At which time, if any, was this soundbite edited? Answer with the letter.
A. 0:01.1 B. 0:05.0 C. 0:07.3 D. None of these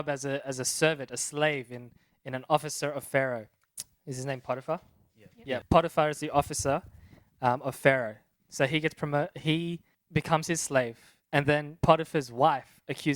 D